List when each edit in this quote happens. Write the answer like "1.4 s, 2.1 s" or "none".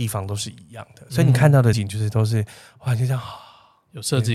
1.7 s